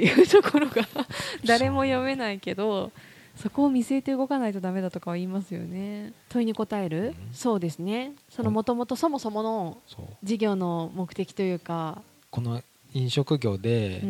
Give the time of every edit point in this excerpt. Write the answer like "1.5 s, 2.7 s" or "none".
6.2 s

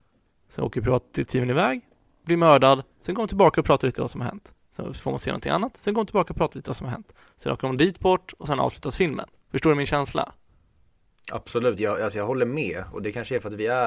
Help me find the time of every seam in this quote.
none

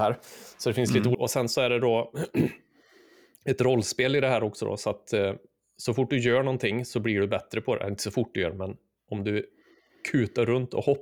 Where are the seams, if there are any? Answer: 1.1 s

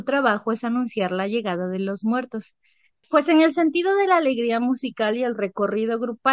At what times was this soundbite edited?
3.0 s

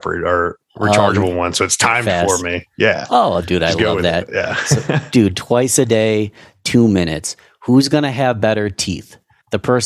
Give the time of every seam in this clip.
none

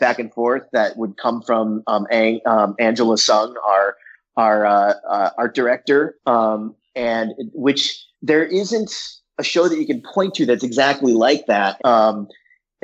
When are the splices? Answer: 6.1 s, 8.1 s, 11.8 s

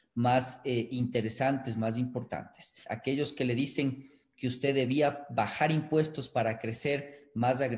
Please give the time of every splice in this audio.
2.8 s

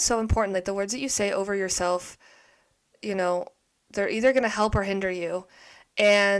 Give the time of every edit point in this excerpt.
none

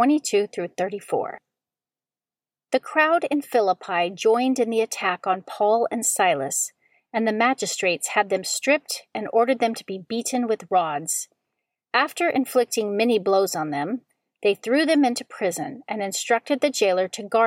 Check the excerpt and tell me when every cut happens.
none

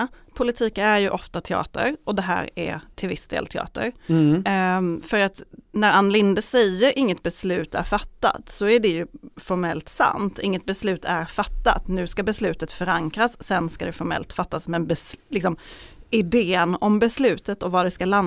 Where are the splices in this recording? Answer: none

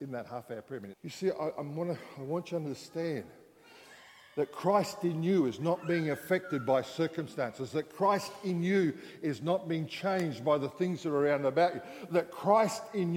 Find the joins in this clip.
0.9 s

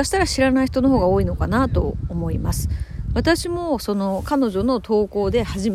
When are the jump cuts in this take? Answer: none

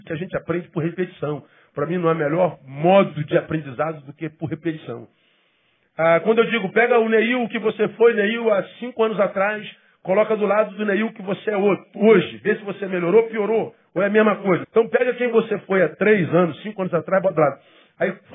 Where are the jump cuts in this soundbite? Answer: 14.6 s

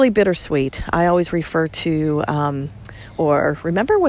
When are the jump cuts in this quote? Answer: 3.1 s

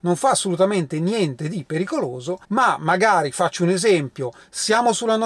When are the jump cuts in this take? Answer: 2.4 s

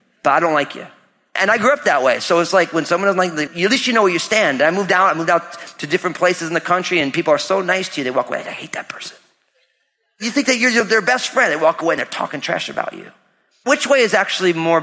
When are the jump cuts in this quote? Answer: 3.5 s

